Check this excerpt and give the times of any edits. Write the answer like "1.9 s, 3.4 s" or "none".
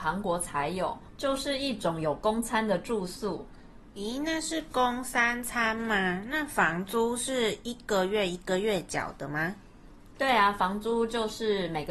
none